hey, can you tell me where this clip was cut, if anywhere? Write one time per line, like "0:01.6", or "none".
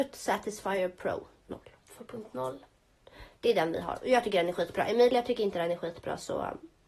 0:01.4

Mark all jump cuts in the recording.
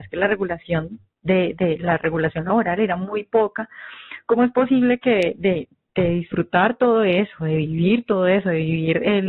none

